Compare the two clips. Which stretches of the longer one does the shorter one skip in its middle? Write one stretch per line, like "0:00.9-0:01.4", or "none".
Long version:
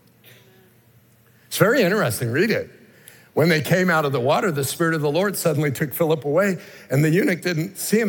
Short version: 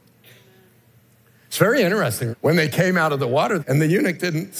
0:02.3-0:03.2
0:04.5-0:06.8